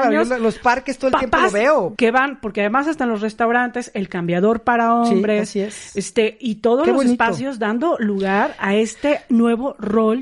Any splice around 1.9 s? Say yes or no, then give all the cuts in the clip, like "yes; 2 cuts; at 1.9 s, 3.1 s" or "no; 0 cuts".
yes; 1 cut; at 1.9 s